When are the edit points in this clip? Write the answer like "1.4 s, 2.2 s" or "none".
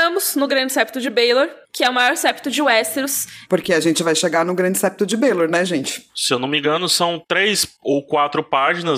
1.6 s, 3.5 s

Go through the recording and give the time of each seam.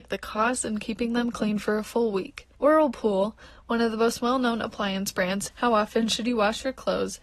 2.5 s, 5.5 s

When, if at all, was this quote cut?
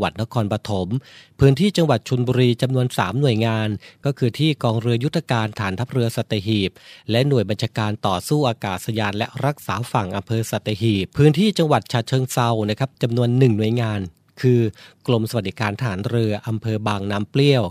11.1 s

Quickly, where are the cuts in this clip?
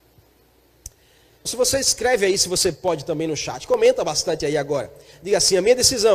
1.5 s

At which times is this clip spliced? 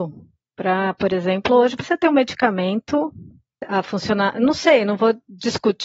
none

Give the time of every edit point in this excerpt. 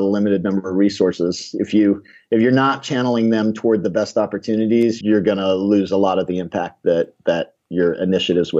5.0 s

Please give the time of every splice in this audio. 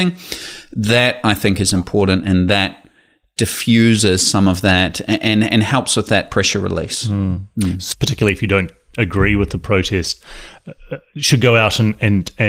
7.9 s

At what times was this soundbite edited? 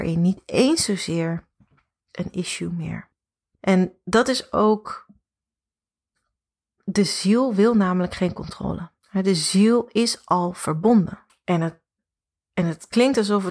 9.0 s, 11.3 s

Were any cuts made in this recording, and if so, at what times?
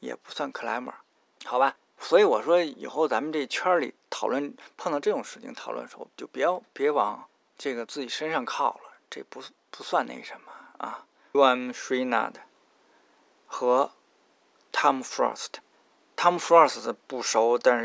11.3 s

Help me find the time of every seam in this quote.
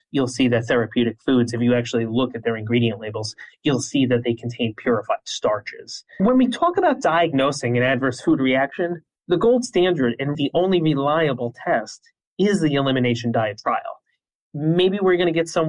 6.2 s, 10.3 s

